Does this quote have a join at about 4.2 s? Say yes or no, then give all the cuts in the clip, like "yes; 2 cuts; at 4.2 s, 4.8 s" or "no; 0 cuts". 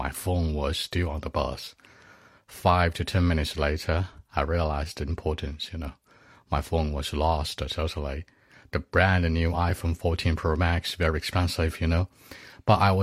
no; 0 cuts